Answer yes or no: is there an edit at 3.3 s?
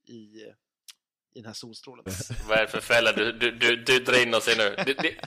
no